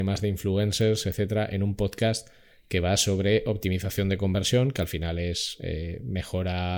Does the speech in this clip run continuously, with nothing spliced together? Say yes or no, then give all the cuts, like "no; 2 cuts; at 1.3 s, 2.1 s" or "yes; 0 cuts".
yes; 0 cuts